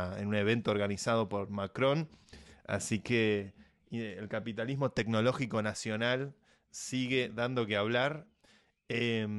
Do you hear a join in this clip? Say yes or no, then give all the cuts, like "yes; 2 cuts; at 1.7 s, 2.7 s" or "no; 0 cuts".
no; 0 cuts